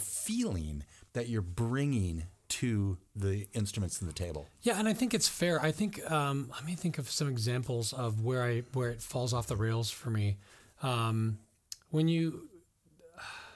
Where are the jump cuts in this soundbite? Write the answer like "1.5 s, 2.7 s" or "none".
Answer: none